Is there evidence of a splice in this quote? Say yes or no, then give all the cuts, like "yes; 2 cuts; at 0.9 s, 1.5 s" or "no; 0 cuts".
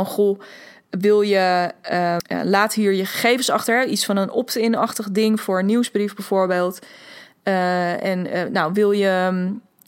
yes; 1 cut; at 2.2 s